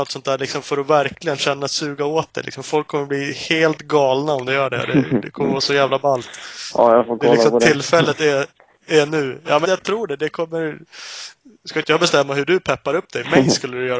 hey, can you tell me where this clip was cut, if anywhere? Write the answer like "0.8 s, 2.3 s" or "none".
9.6 s